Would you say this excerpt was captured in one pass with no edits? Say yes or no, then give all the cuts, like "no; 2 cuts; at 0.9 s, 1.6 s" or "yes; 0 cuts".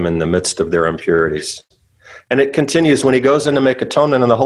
yes; 0 cuts